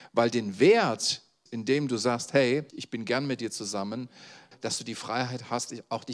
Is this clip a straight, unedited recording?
no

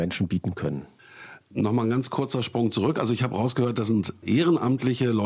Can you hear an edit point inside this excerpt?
no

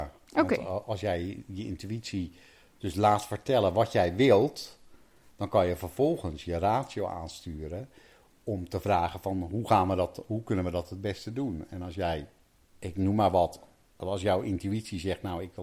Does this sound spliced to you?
no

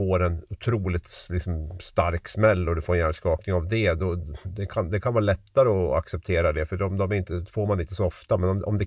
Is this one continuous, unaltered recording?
yes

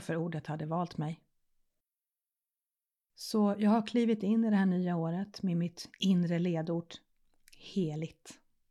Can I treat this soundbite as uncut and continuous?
yes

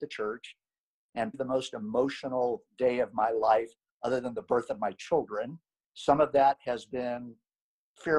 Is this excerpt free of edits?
no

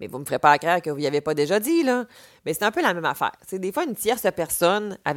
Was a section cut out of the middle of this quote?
no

